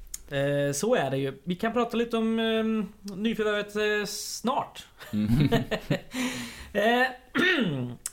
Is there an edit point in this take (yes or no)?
no